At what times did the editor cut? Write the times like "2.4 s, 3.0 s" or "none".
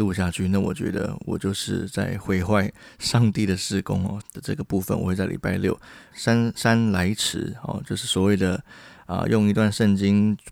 4.2 s, 6.1 s

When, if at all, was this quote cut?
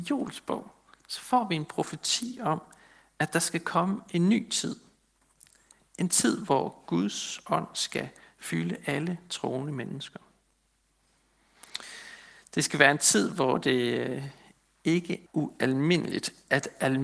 15.3 s

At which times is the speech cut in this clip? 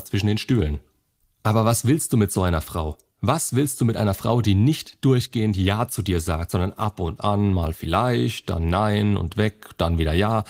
none

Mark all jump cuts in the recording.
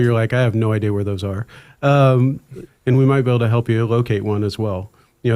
2.7 s

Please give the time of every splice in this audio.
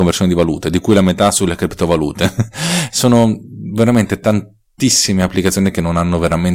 none

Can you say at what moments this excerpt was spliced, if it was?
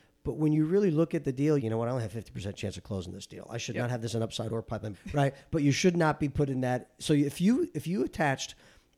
1.6 s, 4.9 s

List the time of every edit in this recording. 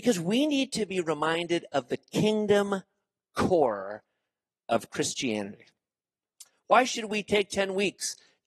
6.5 s

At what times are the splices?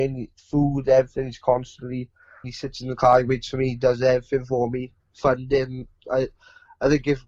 2.4 s

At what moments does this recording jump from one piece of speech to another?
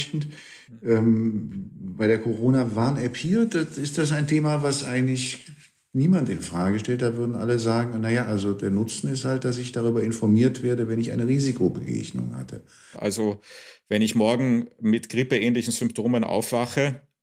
12.9 s

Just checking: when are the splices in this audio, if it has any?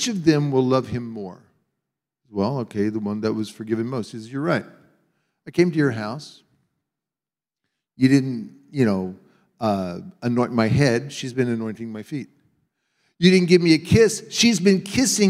none

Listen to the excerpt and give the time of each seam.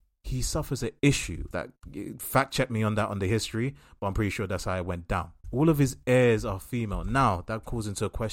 1.5 s, 5.4 s

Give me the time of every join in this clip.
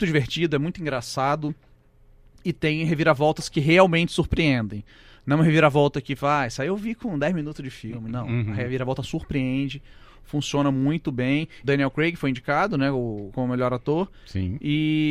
11.6 s

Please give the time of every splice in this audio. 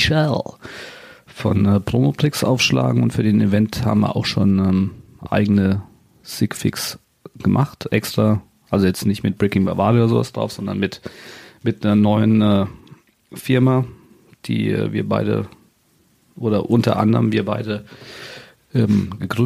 none

